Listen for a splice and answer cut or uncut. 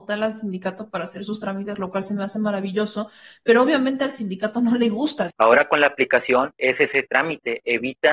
cut